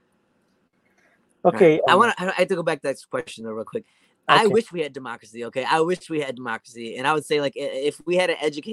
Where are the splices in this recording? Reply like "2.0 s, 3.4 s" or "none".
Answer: 1.9 s